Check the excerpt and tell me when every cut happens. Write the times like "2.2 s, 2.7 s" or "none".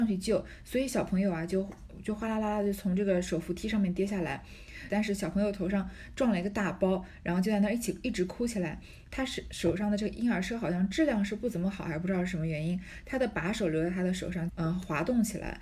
4.9 s, 9.1 s, 14.5 s